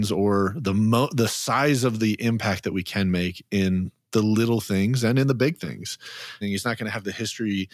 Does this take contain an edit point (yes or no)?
yes